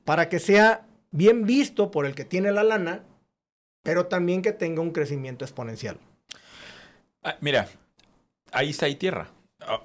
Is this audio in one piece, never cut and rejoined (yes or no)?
yes